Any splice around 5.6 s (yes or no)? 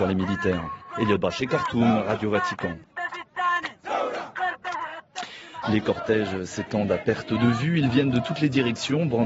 yes